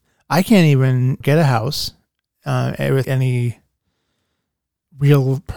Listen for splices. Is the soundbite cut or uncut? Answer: cut